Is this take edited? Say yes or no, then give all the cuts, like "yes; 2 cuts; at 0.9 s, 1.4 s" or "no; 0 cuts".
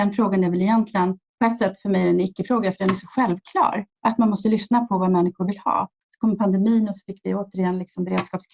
yes; 2 cuts; at 4.0 s, 6.0 s